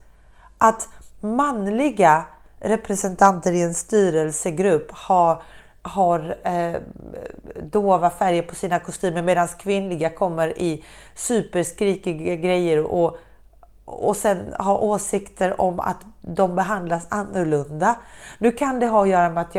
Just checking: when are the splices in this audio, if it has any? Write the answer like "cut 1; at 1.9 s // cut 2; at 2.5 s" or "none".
none